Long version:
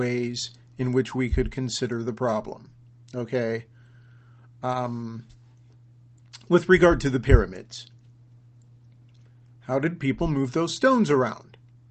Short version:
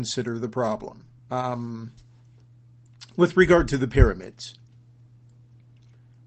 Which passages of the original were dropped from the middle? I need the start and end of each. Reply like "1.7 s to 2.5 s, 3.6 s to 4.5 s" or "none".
2.8 s to 4.5 s